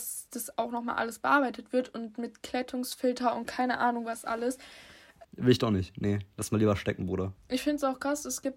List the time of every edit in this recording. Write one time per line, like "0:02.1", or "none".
0:05.2
0:07.4